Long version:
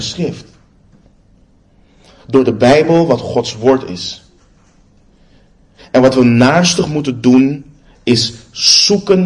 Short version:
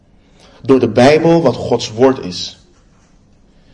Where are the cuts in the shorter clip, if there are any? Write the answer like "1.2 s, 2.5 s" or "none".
none